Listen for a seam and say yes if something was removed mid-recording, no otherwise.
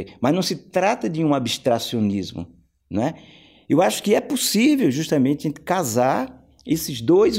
no